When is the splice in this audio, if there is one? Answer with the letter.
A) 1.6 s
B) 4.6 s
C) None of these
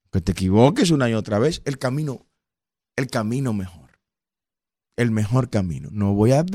A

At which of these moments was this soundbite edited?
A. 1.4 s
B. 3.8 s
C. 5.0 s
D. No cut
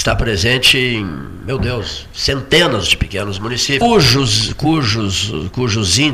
B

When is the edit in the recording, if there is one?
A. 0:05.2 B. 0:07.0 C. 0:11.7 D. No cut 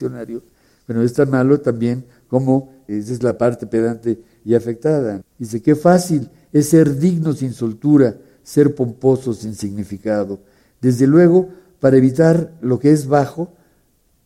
A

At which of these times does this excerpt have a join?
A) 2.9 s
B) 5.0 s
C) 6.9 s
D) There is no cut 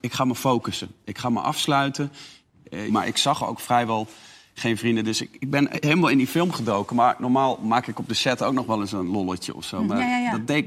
A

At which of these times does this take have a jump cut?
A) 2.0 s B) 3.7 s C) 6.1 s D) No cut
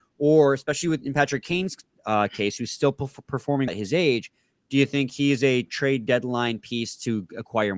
B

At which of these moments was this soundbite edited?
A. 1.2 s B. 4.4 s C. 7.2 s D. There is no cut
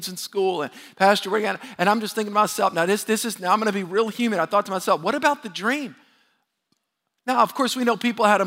D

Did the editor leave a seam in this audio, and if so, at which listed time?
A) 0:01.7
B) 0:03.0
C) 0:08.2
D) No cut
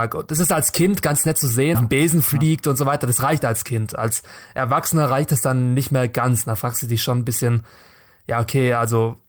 A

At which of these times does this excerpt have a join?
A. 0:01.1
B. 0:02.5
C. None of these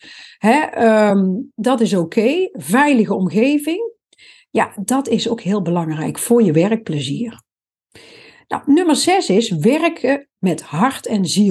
C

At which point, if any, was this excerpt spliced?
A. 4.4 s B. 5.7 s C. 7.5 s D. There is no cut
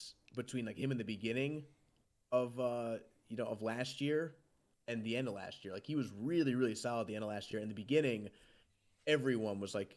D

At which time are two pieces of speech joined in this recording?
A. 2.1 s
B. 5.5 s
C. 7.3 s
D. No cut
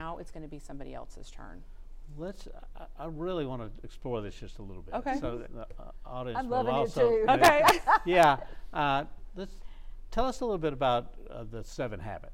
B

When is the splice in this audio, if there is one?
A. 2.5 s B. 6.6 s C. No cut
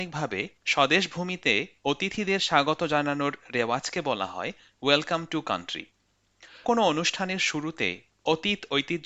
B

